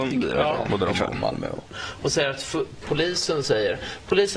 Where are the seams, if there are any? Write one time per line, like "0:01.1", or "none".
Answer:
0:01.7
0:02.8